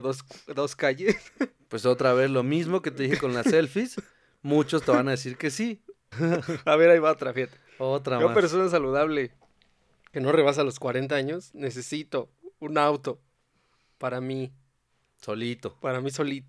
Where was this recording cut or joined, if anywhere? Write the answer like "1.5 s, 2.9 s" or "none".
6.1 s